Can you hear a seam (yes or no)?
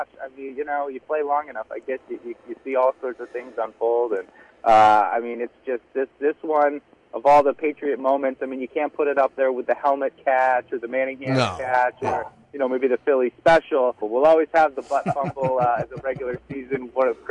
yes